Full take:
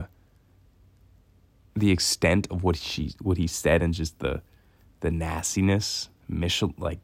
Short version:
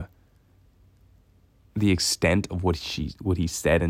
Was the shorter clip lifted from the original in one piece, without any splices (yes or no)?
yes